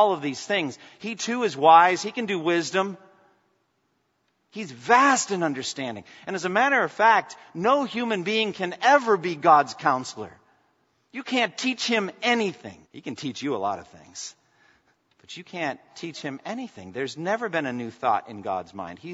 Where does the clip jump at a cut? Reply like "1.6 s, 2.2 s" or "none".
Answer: 12.8 s